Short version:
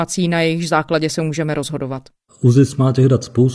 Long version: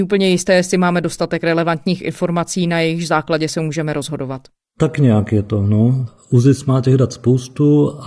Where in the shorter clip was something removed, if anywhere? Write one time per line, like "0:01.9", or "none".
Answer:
0:02.3